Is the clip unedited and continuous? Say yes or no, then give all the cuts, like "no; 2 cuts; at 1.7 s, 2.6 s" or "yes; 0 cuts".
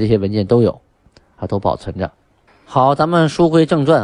no; 1 cut; at 2.5 s